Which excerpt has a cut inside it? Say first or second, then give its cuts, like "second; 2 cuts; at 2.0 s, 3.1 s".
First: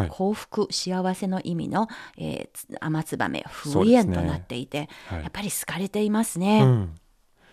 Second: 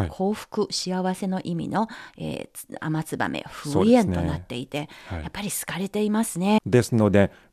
second; 1 cut; at 6.6 s